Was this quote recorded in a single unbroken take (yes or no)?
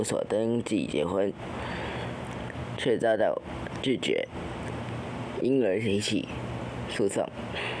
yes